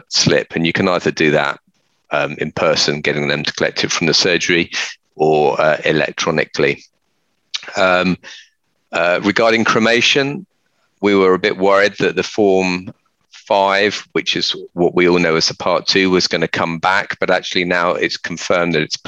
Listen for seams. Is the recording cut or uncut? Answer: uncut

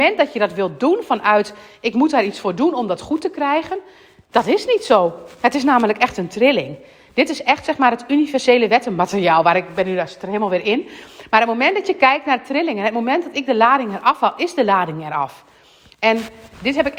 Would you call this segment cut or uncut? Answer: uncut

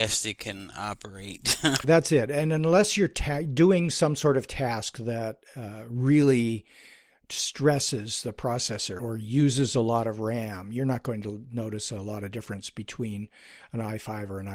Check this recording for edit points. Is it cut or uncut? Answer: cut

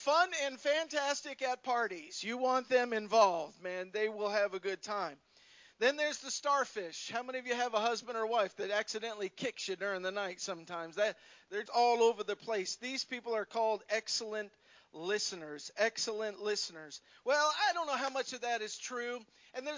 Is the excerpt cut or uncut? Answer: cut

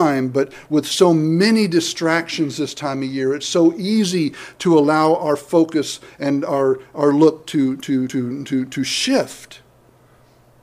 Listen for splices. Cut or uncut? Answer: uncut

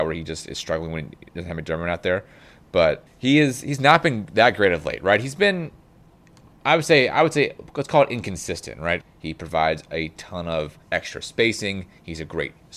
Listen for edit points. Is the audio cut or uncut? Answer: cut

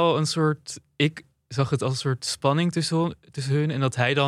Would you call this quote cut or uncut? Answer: uncut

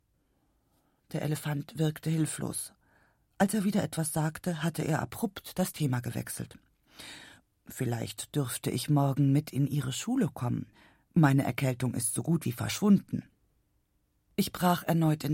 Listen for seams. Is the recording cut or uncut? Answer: uncut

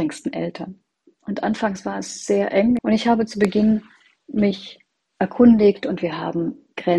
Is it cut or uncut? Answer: cut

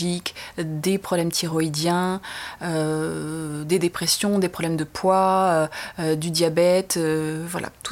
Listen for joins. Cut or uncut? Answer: uncut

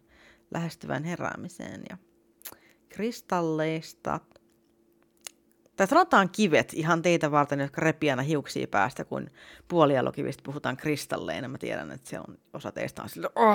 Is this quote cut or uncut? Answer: uncut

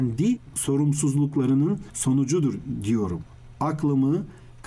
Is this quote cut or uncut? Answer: cut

